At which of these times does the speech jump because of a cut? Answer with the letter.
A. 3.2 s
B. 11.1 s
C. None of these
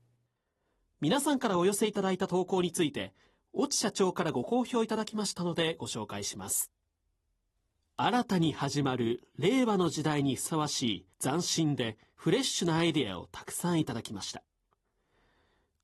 B